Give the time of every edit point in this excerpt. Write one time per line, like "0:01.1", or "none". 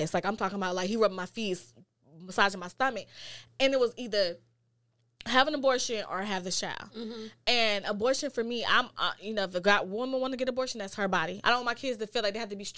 0:11.4